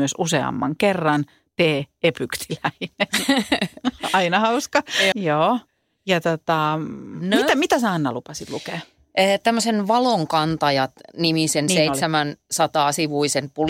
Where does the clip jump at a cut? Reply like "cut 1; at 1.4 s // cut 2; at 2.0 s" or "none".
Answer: cut 1; at 5.1 s